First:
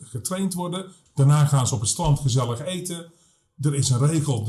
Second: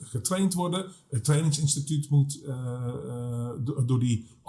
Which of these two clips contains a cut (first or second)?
first